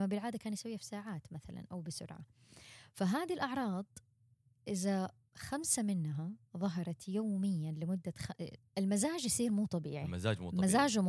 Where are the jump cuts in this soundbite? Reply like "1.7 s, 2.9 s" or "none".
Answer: 8.6 s